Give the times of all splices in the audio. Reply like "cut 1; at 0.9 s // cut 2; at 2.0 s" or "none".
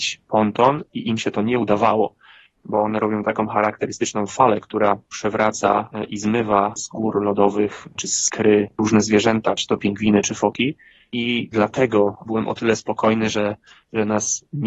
cut 1; at 12.3 s